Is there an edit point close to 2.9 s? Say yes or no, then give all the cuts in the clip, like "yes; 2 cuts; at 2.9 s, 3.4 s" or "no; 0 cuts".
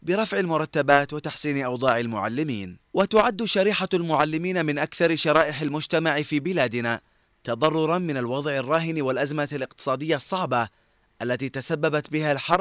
yes; 1 cut; at 2.9 s